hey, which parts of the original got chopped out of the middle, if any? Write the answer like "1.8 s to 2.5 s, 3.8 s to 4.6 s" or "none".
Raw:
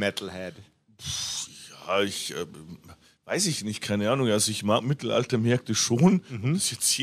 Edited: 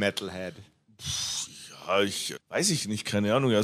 2.3 s to 3.1 s